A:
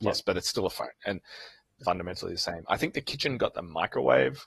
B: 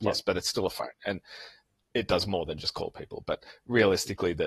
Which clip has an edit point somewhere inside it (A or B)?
A